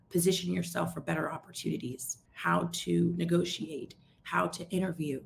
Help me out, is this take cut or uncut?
cut